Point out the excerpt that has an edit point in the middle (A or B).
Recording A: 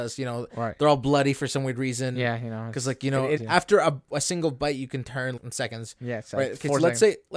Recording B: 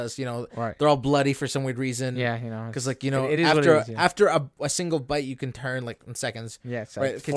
A